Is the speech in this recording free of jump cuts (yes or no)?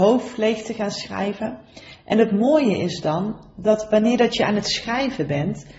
yes